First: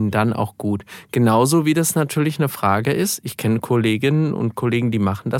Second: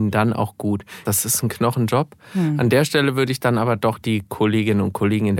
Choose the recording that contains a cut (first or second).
second